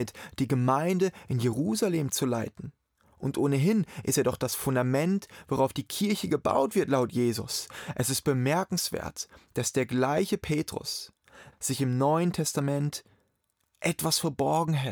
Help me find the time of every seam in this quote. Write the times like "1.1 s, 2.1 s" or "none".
11.5 s

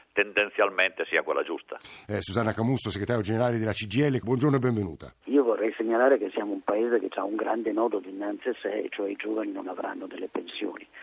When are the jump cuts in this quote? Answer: none

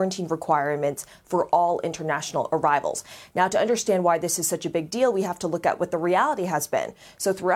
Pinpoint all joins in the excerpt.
none

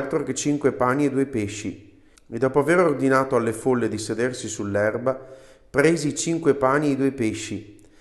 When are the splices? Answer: 2.1 s

